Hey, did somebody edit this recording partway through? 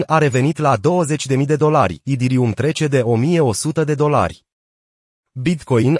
no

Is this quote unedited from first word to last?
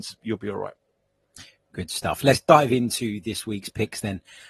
yes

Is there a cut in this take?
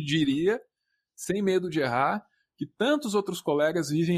no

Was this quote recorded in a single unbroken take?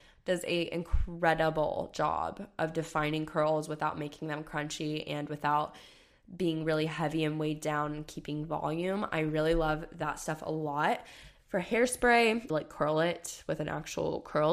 no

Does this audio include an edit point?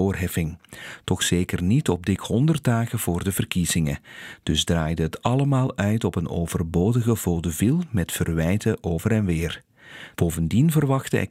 yes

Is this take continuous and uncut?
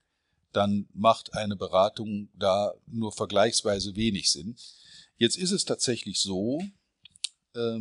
yes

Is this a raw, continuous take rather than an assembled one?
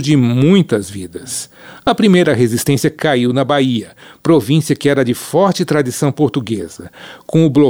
yes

